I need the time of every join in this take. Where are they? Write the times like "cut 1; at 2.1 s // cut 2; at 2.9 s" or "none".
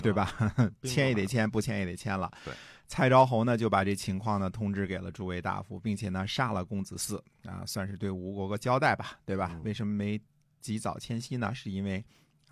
none